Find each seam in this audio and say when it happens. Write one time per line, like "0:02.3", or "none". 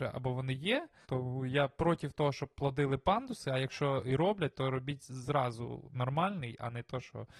0:01.0

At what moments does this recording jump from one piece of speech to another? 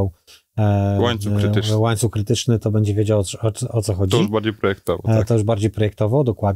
none

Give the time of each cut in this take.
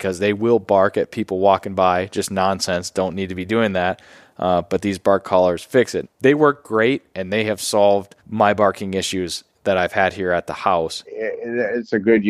0:06.0
0:08.2
0:11.0

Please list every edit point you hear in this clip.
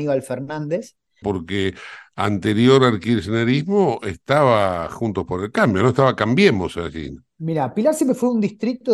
0:01.2

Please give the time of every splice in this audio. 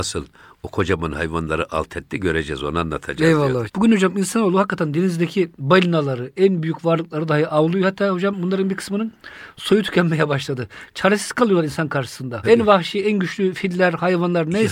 0:03.7
0:12.4

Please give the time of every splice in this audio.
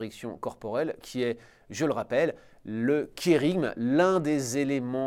none

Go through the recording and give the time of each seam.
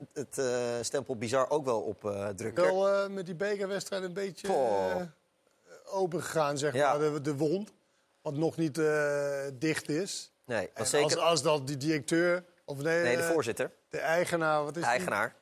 0:02.6

